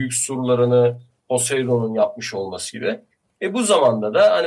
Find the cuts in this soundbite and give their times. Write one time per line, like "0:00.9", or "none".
none